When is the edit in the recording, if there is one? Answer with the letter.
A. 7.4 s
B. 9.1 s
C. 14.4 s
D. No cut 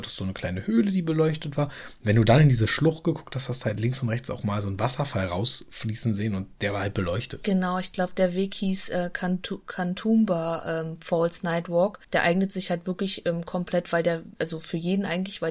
C